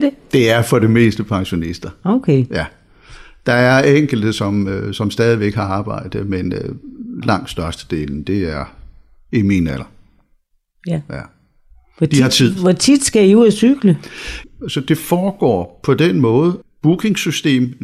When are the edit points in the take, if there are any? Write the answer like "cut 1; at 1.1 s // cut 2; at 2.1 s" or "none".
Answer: cut 1; at 7.2 s // cut 2; at 14.4 s // cut 3; at 16.6 s